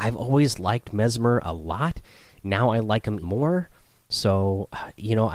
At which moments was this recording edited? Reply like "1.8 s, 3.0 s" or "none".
3.2 s